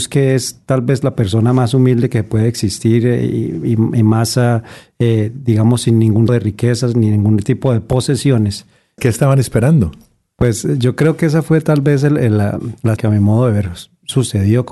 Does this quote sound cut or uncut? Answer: cut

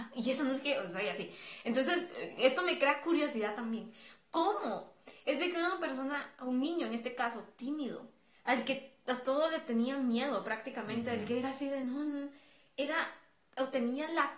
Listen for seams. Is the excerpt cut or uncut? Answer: uncut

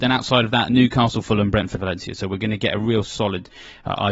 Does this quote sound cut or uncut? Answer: cut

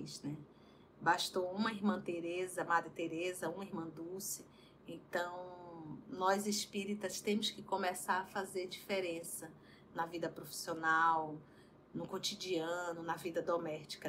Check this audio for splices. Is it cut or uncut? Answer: uncut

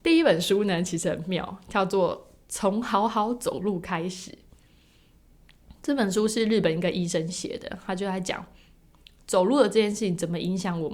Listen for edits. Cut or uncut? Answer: uncut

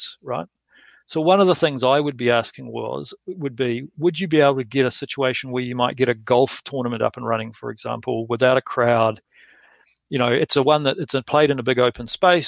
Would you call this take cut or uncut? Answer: uncut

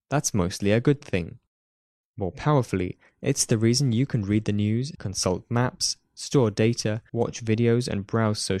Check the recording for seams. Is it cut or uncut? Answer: cut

